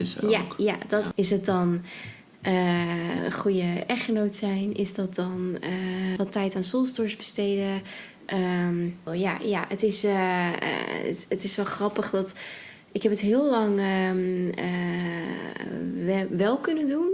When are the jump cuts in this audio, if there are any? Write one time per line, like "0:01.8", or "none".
0:01.1
0:06.2
0:09.1